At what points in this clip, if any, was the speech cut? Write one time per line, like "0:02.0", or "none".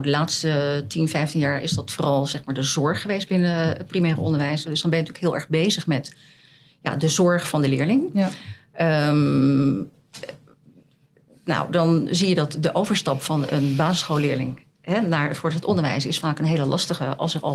0:04.6